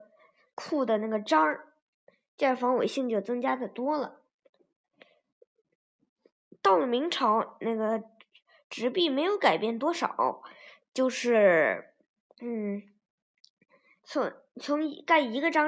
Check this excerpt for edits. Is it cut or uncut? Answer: uncut